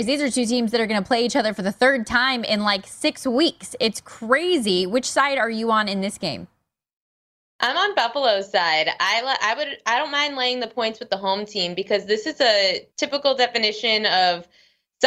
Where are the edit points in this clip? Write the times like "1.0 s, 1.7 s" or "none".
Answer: none